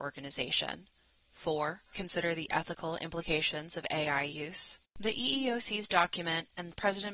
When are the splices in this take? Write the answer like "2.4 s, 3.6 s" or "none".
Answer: 1.9 s, 4.8 s

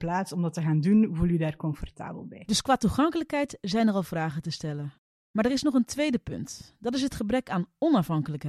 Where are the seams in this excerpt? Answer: none

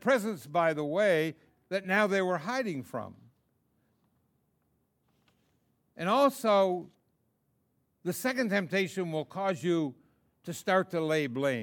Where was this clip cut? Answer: none

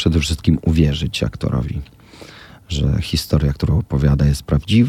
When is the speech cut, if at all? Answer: none

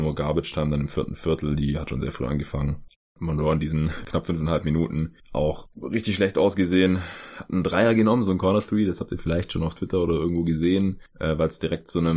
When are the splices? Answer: none

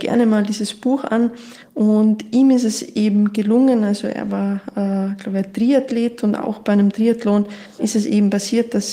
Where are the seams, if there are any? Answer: 7.8 s

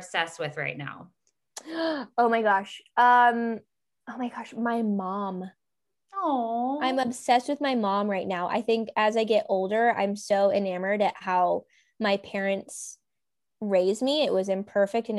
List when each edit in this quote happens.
none

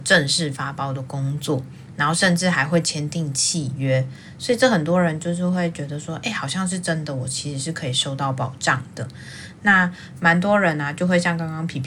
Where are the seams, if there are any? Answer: none

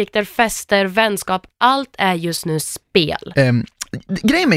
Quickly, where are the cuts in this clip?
3.3 s

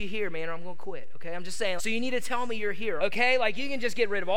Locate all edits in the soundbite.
1.8 s, 3.0 s

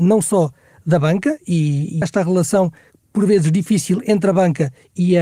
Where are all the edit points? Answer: 2.0 s

